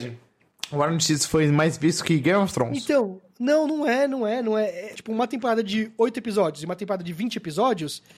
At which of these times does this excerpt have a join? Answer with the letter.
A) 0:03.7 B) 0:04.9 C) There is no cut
B